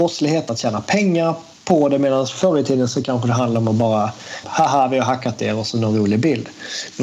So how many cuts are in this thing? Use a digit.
1